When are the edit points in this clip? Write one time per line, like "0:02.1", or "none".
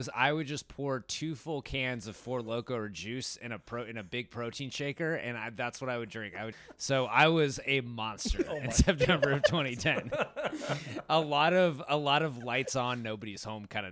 0:06.5